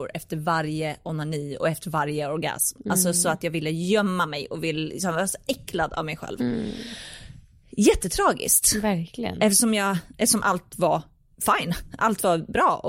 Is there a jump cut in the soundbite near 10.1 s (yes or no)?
yes